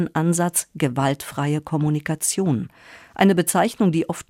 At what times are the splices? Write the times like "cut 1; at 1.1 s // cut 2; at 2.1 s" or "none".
none